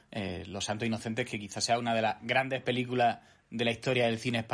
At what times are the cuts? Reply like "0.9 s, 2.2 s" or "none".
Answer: none